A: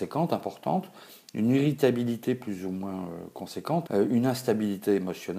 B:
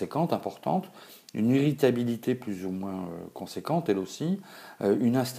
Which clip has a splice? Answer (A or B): A